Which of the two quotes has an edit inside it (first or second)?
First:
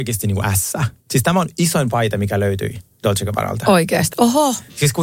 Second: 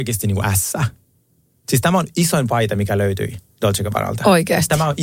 first